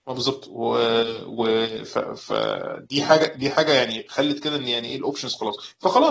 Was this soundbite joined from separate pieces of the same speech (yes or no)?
no